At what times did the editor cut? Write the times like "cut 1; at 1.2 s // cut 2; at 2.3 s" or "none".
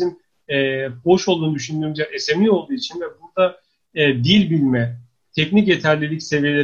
cut 1; at 1.0 s